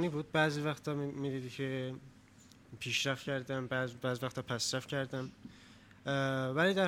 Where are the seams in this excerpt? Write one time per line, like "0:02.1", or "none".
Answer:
none